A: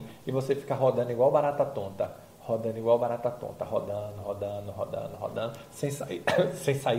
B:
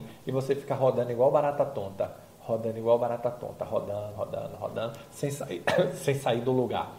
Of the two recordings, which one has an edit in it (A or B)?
B